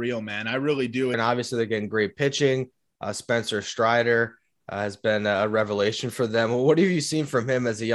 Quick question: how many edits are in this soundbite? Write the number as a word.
one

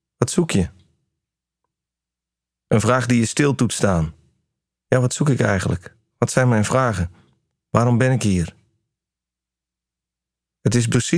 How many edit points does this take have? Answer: one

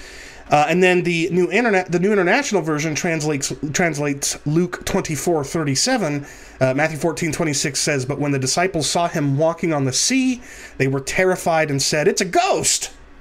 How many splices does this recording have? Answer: one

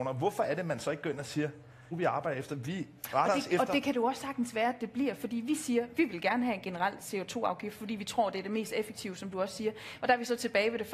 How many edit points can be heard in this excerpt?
two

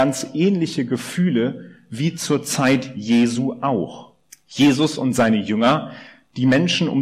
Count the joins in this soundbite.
one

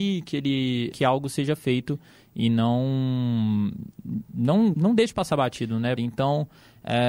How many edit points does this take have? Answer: three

